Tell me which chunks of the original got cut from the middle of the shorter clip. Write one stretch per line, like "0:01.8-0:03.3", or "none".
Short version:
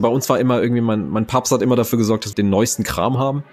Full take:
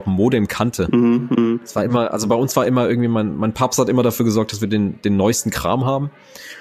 0:04.6-0:05.0